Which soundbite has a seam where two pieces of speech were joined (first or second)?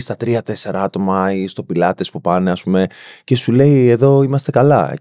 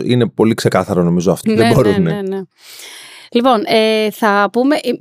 second